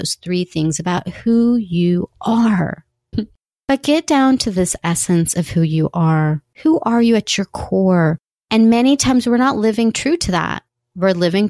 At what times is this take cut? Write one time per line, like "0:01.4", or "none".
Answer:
0:03.1
0:06.5
0:08.3